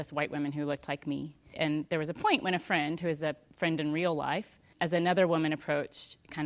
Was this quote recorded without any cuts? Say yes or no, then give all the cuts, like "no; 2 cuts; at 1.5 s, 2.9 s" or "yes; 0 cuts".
no; 2 cuts; at 1.5 s, 4.7 s